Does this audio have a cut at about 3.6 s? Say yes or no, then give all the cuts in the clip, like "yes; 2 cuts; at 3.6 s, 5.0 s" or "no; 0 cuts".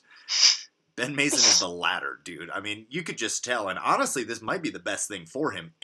no; 0 cuts